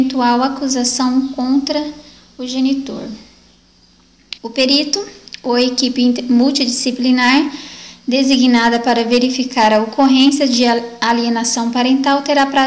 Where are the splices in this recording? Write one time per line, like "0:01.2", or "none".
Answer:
0:04.4